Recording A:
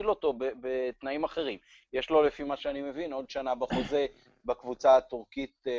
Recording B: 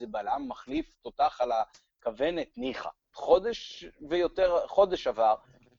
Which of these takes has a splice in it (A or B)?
B